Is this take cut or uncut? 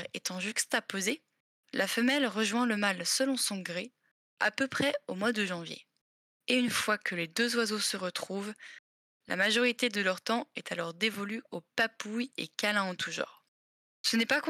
uncut